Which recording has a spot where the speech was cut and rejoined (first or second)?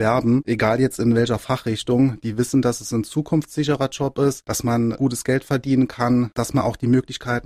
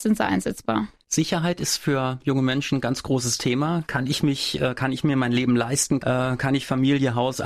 second